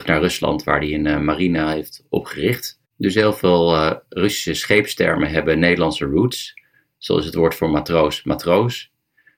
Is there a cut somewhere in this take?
no; 0 cuts

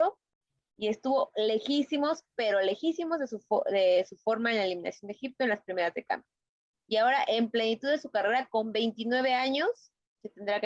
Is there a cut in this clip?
yes; 1 cut; at 6.7 s

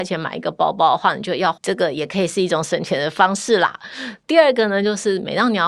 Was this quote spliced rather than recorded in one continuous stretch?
yes; 1 cut; at 1.6 s

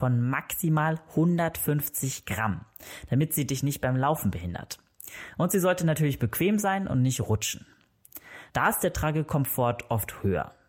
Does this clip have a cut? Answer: yes; 1 cut; at 8.5 s

